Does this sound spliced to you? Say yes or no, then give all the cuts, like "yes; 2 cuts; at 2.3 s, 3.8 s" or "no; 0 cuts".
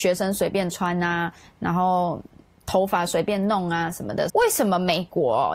yes; 1 cut; at 4.3 s